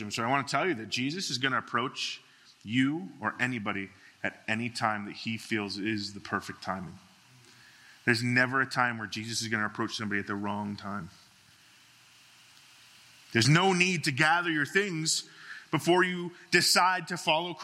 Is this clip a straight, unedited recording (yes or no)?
yes